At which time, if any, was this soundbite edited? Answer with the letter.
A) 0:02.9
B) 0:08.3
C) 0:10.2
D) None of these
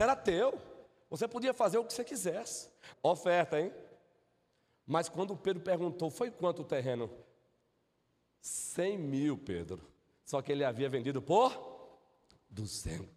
A